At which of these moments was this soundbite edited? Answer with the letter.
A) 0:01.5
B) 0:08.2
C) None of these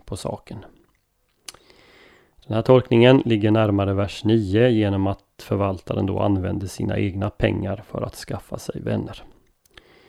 C